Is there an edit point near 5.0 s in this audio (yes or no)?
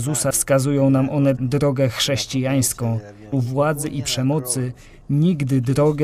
no